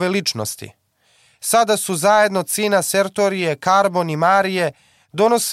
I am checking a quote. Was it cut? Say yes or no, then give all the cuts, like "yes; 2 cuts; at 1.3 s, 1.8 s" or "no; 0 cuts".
no; 0 cuts